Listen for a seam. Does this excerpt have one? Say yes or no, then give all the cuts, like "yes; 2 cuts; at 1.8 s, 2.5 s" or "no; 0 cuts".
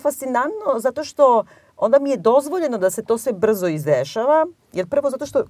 no; 0 cuts